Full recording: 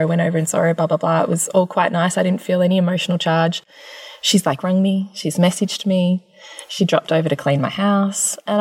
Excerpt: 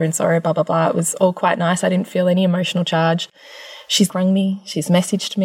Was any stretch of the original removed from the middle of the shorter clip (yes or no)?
yes